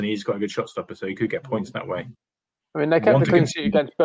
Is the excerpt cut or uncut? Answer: uncut